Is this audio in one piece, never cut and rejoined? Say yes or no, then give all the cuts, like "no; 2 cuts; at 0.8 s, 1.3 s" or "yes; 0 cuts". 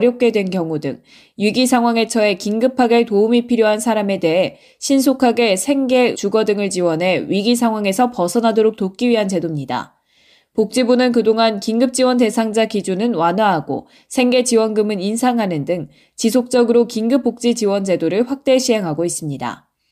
no; 1 cut; at 6.1 s